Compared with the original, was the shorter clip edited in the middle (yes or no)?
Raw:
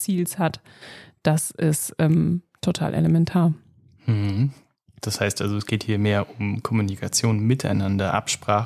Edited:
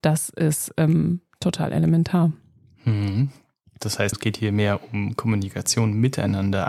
yes